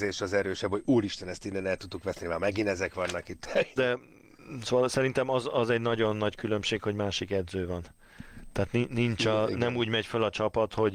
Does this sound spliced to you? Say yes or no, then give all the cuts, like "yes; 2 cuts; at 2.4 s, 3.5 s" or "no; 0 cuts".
yes; 1 cut; at 3.8 s